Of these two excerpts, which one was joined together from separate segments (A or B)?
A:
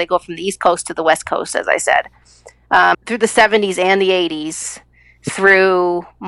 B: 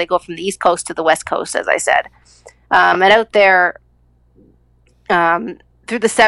A